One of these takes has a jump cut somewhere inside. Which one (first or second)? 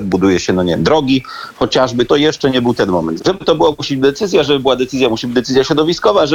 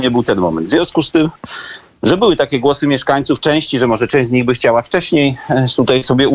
first